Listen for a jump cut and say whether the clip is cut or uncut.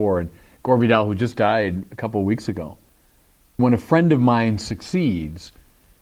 cut